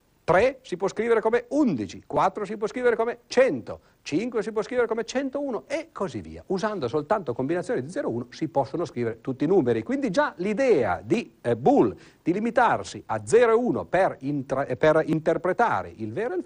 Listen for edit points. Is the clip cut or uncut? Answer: uncut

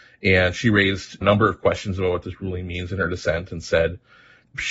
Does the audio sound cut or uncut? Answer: uncut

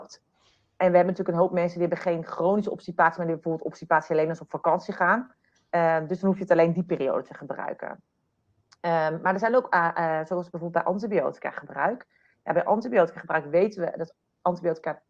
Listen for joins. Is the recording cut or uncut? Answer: uncut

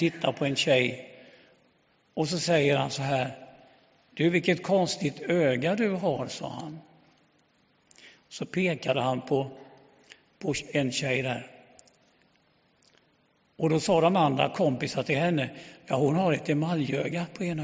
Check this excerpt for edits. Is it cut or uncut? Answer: uncut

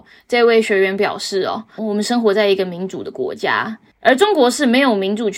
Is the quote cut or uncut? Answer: cut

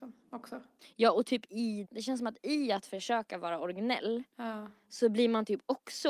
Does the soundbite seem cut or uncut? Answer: cut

